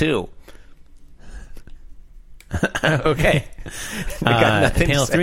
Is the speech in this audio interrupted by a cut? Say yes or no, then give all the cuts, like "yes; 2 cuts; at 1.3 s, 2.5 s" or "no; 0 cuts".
no; 0 cuts